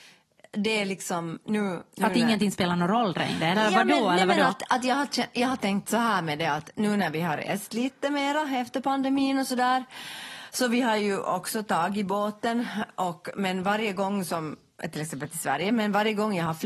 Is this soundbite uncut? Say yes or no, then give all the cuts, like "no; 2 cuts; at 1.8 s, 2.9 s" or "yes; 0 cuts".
yes; 0 cuts